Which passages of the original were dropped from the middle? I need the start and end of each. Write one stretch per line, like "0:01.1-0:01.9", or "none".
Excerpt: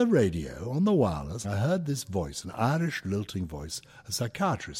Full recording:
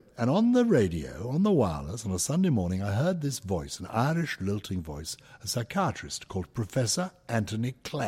0:02.0-0:02.8

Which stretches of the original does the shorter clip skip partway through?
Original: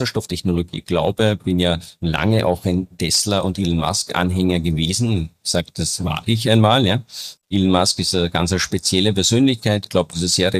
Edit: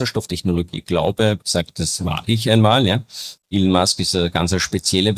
0:01.4-0:05.4

